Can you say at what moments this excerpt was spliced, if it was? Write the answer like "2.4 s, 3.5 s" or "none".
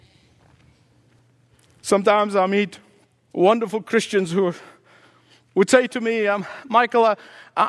none